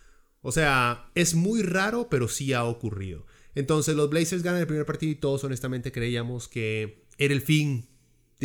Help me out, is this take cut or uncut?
uncut